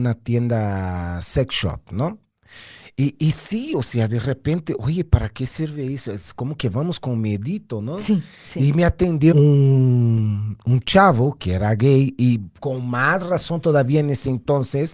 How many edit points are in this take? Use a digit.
1